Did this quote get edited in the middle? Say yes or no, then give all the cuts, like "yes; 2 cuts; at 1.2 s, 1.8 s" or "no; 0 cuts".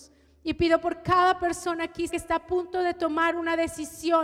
yes; 1 cut; at 2.1 s